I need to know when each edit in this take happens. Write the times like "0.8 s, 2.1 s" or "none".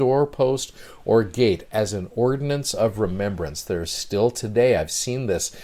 none

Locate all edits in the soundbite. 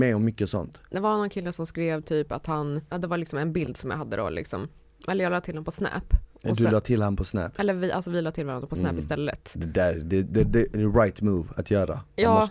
2.9 s

